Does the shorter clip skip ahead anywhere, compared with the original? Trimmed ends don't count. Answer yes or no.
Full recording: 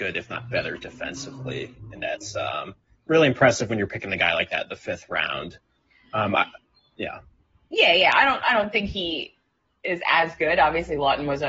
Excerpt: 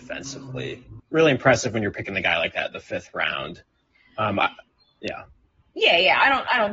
yes